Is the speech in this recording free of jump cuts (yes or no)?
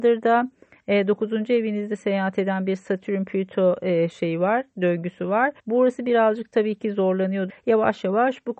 no